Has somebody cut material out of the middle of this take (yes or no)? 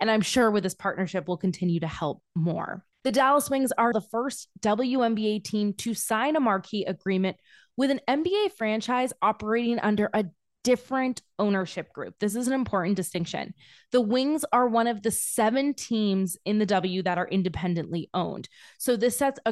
yes